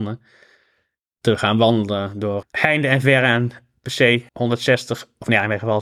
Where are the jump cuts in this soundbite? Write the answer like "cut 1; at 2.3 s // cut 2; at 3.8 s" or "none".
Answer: cut 1; at 2.4 s // cut 2; at 4.3 s